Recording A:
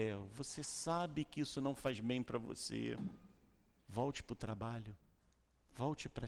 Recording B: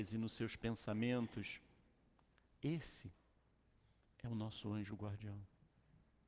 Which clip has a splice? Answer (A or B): A